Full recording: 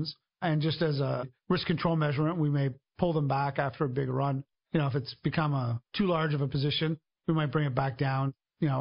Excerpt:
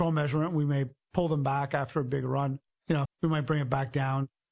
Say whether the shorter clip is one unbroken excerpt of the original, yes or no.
no